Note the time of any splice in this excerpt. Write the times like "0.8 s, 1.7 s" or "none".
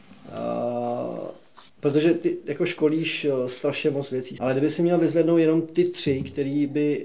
1.7 s, 4.4 s

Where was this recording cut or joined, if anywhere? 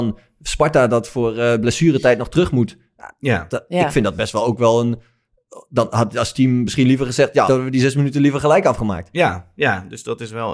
7.5 s

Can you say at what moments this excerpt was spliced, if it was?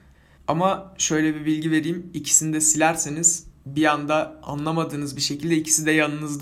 none

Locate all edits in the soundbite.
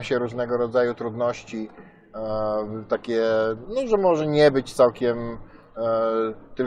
3.6 s

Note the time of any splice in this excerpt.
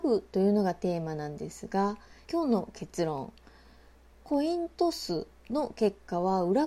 2.3 s

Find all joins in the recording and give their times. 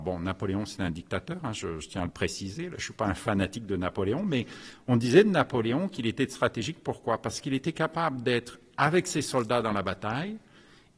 none

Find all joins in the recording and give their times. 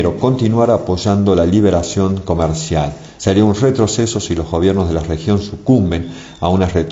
3.2 s

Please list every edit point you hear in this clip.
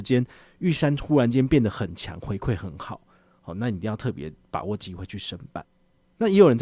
none

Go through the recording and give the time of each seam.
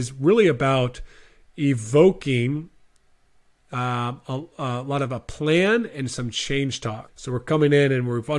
7.1 s

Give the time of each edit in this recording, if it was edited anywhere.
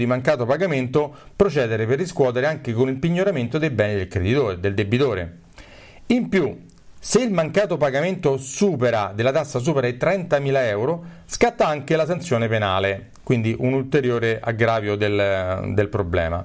none

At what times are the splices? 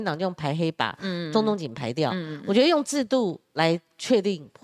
none

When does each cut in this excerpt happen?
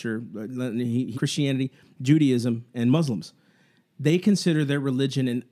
1.1 s

